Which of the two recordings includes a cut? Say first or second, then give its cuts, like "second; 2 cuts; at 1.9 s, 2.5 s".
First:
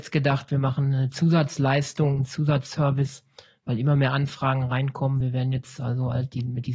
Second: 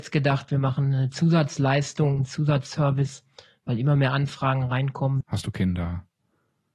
second; 1 cut; at 5.2 s